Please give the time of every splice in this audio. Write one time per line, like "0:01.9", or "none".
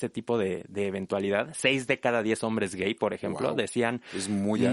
none